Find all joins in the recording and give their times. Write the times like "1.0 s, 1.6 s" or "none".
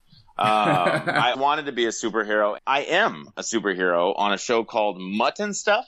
1.3 s, 2.6 s

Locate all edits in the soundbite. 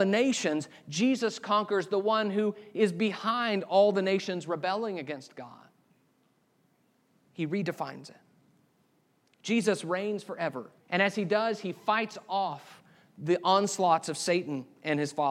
10.8 s

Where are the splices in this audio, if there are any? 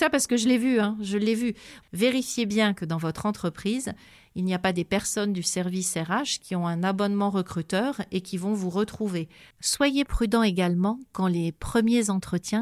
1.8 s, 9.5 s

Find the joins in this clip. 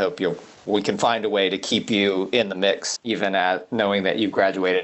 3.0 s

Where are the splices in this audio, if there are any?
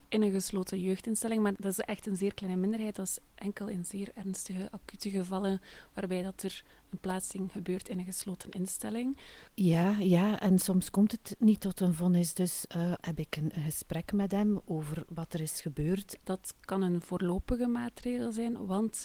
9.5 s, 13.0 s, 16.2 s

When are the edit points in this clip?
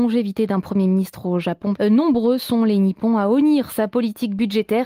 1.8 s

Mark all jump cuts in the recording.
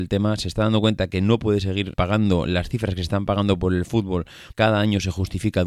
1.9 s, 4.5 s

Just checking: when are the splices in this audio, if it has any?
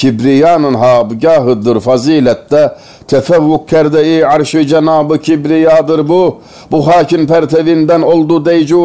none

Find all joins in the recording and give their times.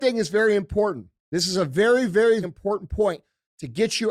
1.2 s, 2.4 s

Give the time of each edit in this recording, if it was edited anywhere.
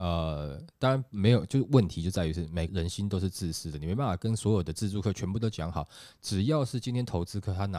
2.7 s

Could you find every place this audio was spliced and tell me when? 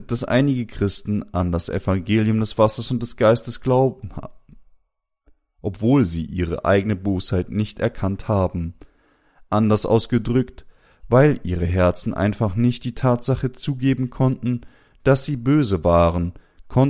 none

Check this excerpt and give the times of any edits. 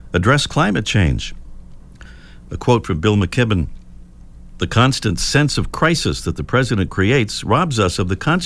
2.5 s

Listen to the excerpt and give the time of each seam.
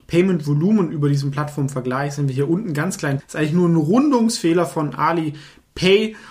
3.2 s

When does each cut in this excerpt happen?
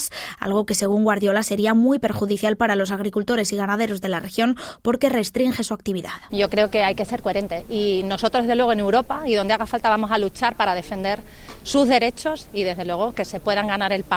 6.3 s

